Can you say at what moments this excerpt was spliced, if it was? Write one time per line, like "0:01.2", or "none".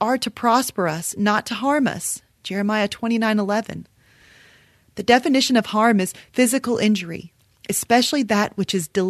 none